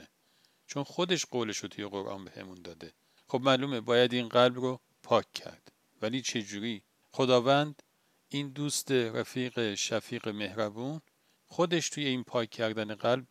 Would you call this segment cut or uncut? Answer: cut